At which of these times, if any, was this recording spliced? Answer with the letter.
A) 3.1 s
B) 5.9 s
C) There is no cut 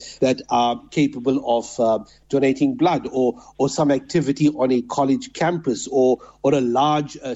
C